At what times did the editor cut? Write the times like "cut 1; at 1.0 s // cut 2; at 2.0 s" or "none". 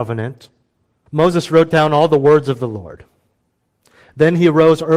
cut 1; at 1.1 s